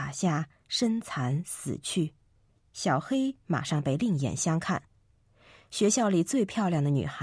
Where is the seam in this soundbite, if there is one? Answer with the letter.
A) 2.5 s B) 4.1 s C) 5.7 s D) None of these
A